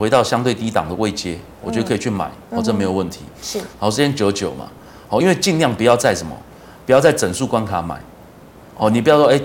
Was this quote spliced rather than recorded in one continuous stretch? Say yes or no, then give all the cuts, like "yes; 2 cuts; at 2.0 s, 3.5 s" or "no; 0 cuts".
no; 0 cuts